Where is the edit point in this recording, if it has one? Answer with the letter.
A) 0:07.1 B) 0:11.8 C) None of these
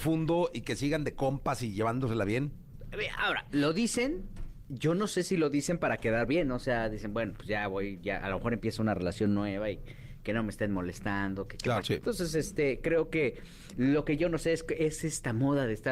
B